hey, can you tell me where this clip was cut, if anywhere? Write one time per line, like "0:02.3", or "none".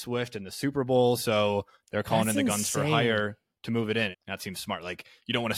0:04.1